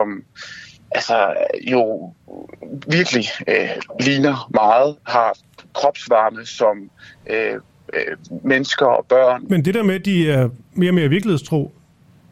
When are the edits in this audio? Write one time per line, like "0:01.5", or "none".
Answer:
0:09.4
0:10.7